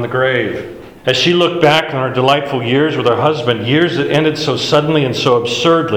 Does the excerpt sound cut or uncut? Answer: cut